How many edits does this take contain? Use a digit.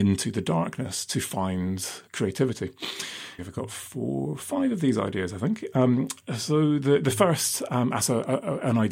2